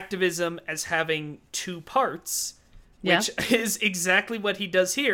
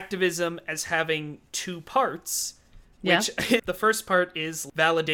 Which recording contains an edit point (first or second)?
second